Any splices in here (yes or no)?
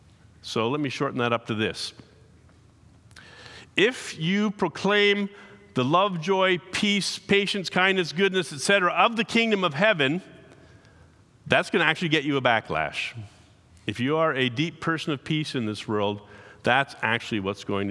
no